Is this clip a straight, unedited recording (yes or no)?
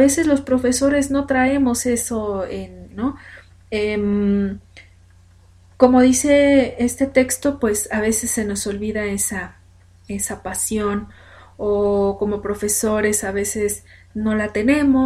no